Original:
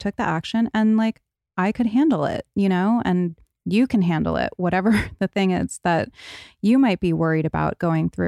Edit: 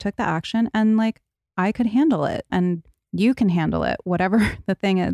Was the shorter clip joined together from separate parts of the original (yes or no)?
yes